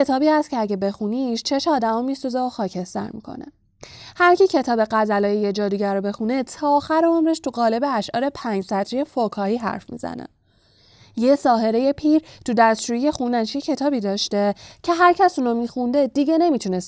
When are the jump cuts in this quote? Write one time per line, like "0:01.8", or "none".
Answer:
none